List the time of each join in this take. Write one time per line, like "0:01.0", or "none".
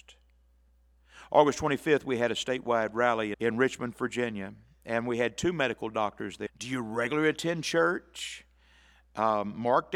0:03.3
0:06.5